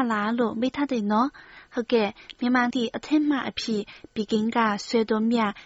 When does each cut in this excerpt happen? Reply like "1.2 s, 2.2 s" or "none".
2.7 s